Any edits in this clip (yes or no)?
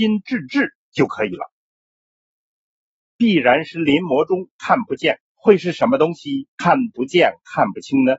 yes